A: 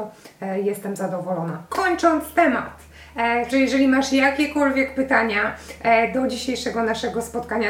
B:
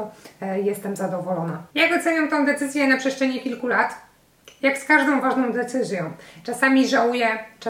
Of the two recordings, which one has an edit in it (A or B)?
A